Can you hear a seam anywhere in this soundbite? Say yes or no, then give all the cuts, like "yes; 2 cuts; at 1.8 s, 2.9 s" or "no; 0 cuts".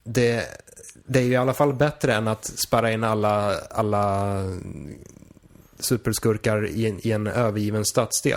no; 0 cuts